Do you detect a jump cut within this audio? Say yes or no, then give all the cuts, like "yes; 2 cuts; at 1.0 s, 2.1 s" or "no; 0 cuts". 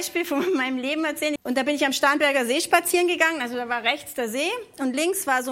yes; 1 cut; at 1.4 s